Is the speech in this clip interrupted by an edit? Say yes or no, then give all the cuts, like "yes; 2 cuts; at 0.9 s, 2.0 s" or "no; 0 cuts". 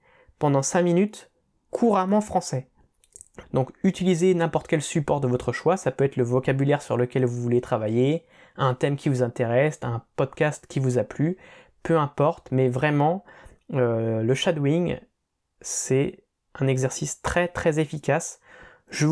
yes; 1 cut; at 3.4 s